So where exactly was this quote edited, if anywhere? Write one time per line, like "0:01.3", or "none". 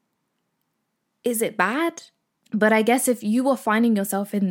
0:02.4